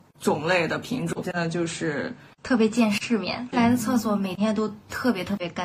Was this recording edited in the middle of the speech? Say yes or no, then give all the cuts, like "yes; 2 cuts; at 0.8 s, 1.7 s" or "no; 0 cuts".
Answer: yes; 2 cuts; at 1.2 s, 3.5 s